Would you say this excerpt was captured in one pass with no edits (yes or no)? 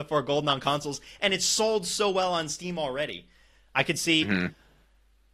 yes